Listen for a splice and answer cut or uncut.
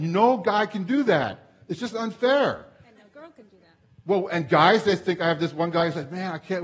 uncut